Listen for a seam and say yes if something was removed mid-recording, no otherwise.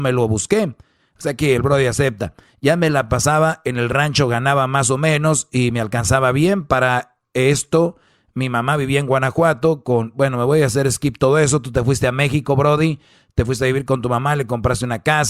no